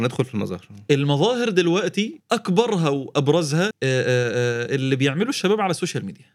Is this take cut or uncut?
cut